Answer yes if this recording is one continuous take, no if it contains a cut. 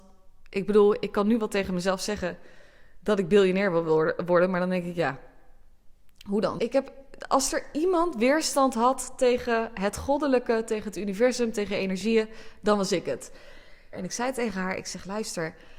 no